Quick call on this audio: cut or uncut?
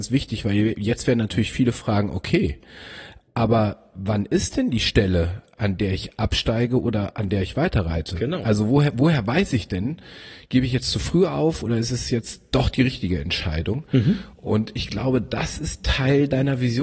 uncut